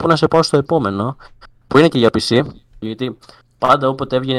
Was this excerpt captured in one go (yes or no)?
no